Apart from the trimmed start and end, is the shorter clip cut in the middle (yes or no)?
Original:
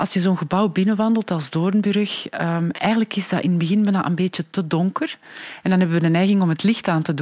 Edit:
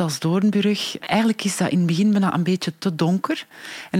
yes